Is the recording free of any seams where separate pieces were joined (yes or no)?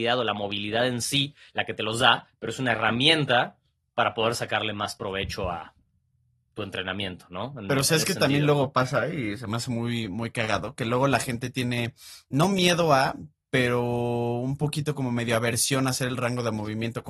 yes